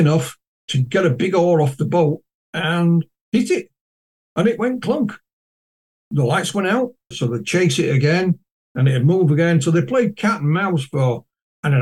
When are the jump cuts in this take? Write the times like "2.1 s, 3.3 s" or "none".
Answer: 7.1 s